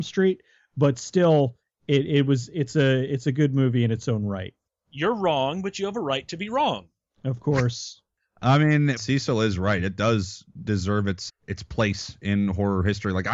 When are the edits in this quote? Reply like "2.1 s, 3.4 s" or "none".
9.0 s, 11.3 s